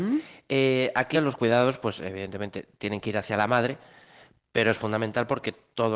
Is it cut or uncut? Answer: cut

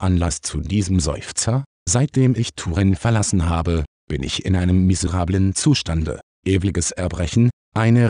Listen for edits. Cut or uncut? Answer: cut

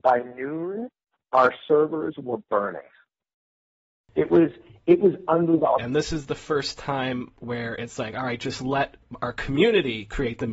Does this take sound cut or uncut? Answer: cut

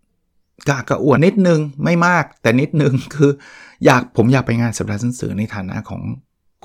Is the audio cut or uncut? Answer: cut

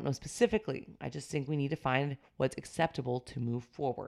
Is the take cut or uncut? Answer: uncut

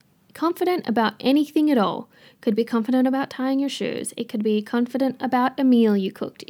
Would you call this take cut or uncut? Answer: uncut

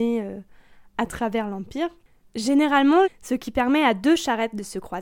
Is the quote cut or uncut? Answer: cut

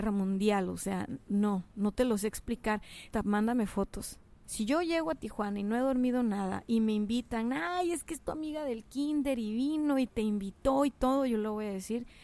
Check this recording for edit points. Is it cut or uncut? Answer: cut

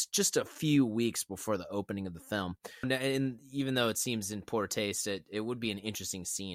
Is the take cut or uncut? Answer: cut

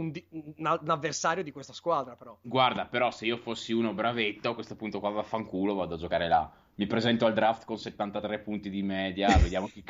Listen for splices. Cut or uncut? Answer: uncut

